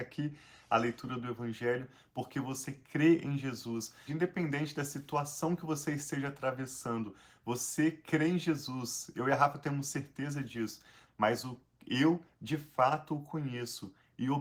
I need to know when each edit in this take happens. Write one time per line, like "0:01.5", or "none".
0:04.1
0:11.1